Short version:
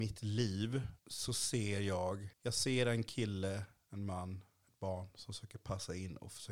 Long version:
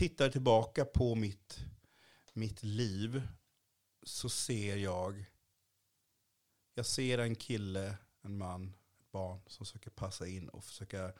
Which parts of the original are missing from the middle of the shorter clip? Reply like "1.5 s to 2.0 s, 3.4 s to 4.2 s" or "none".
3.4 s to 3.9 s, 5.3 s to 6.7 s